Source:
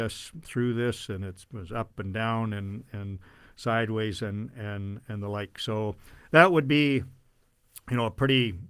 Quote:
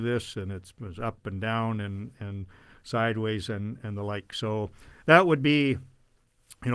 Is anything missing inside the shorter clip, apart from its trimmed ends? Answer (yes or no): yes